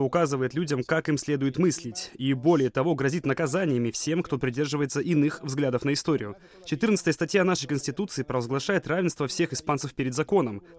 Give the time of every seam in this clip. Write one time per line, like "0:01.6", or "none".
none